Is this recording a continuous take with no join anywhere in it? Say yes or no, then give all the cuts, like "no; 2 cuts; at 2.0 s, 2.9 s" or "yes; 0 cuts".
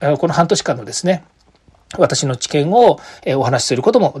yes; 0 cuts